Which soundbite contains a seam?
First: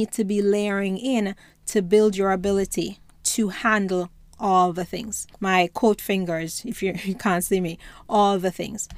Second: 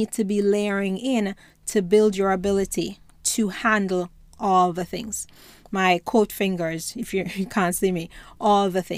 first; 1 cut; at 5.3 s

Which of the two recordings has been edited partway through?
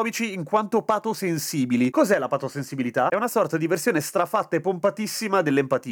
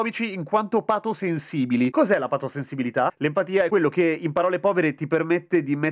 second; 1 cut; at 3.1 s

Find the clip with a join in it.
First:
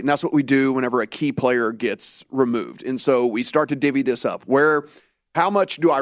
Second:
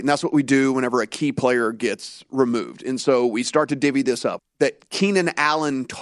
second; 1 cut; at 4.4 s

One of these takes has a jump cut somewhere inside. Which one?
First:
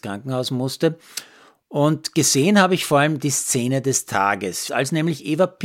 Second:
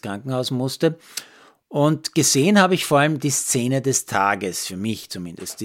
first; 1 cut; at 4.7 s

